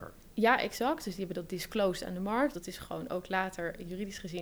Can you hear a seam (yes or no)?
yes